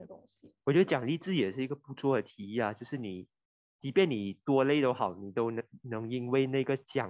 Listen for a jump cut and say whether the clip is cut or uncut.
uncut